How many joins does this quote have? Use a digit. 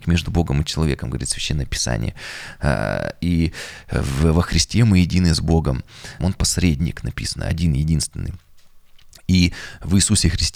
1